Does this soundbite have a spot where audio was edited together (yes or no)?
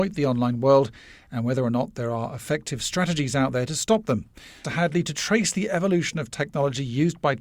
yes